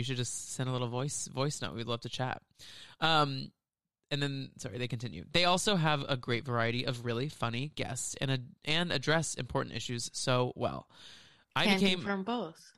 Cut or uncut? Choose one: uncut